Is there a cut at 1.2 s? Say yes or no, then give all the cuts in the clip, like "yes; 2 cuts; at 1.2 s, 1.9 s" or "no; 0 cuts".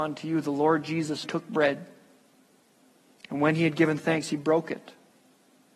yes; 1 cut; at 1.2 s